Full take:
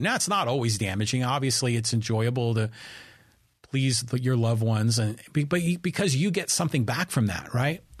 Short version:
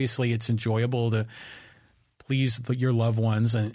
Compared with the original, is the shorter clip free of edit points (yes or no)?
yes